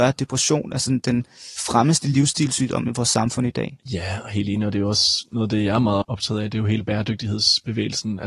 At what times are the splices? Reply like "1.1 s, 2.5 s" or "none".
6.0 s